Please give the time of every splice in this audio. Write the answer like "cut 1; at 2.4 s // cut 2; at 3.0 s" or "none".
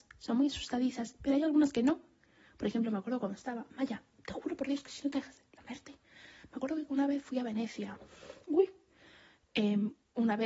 none